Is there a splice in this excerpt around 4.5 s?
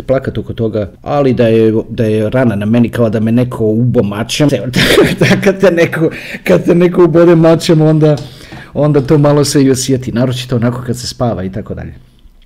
yes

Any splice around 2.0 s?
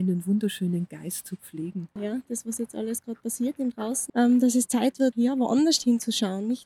yes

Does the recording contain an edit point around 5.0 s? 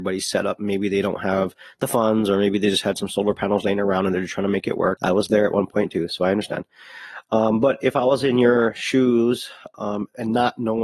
yes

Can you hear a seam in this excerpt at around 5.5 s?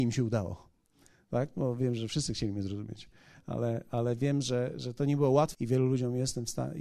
yes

